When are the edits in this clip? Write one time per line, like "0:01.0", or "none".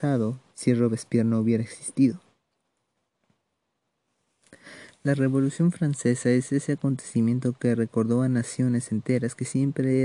none